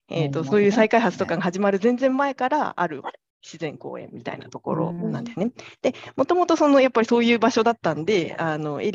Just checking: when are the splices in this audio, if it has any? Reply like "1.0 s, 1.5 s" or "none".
none